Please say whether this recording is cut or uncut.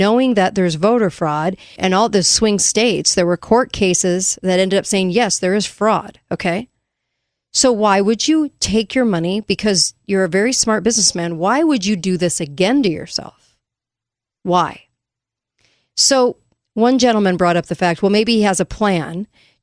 cut